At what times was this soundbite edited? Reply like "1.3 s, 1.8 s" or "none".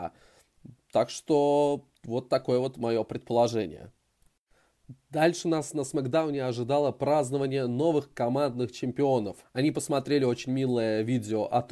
9.4 s